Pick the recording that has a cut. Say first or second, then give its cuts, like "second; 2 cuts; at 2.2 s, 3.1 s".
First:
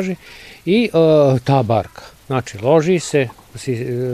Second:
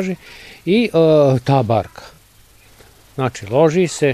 first; 1 cut; at 2.2 s